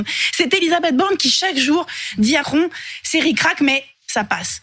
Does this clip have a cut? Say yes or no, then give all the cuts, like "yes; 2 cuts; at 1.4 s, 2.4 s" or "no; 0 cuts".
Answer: yes; 1 cut; at 2.4 s